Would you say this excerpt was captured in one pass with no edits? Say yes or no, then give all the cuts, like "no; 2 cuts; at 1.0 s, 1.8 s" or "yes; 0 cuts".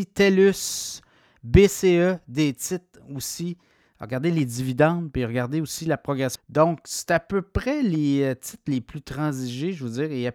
no; 1 cut; at 6.4 s